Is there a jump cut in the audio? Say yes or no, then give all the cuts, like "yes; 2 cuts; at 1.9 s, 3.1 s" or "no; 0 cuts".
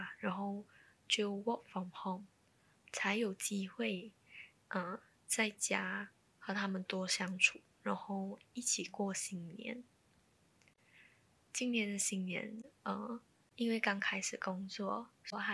no; 0 cuts